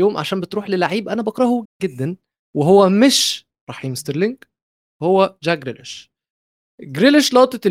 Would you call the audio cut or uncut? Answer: cut